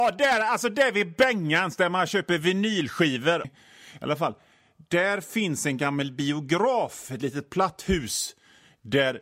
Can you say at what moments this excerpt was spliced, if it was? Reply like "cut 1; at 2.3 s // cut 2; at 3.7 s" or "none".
cut 1; at 3.4 s